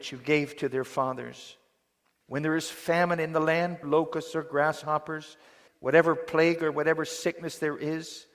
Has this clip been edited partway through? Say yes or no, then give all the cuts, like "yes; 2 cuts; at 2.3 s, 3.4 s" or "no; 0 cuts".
yes; 3 cuts; at 2.2 s, 3.8 s, 5.7 s